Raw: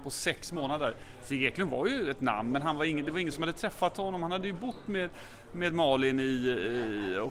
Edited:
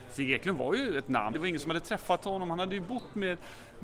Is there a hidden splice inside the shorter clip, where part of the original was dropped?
yes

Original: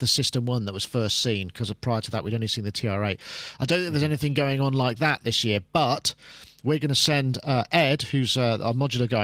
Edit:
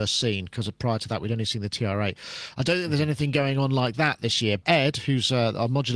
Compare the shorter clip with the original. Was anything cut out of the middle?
yes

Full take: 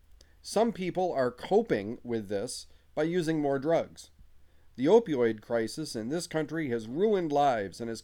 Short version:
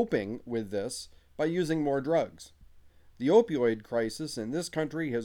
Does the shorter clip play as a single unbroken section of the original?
yes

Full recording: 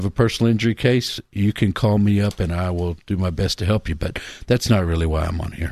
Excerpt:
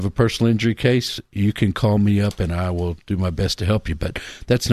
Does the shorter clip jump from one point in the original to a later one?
no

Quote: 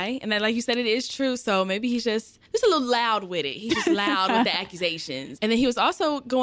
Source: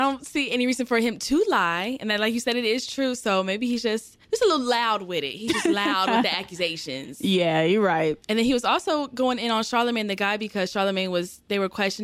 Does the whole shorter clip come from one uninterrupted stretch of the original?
no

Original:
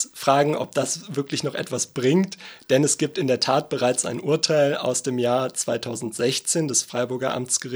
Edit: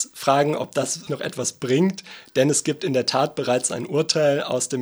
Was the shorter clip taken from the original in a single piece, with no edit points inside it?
no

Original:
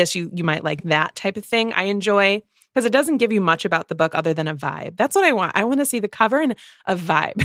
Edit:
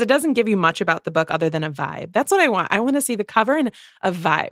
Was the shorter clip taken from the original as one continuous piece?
yes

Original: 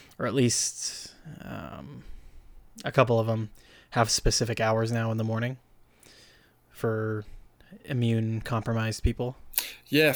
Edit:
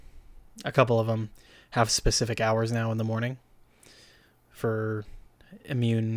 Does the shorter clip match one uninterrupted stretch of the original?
yes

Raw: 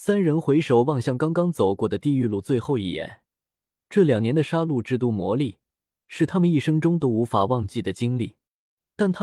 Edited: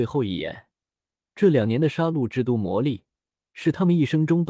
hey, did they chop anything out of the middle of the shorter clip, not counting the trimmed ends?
no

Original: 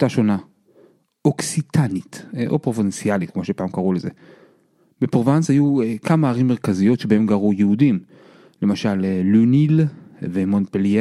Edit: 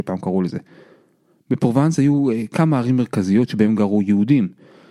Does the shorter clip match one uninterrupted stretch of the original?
yes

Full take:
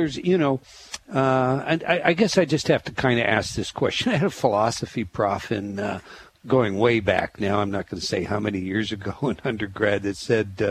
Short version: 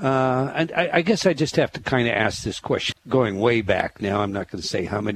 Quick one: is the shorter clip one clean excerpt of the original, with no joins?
no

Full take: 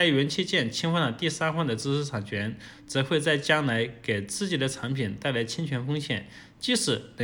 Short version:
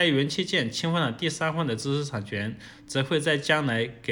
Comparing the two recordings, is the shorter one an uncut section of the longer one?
yes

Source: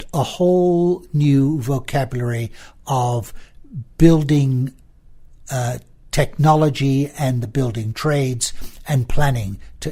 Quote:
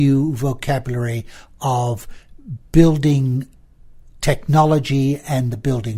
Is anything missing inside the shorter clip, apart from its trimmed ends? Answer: yes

